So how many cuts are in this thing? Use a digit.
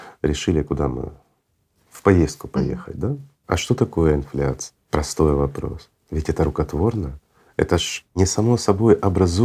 1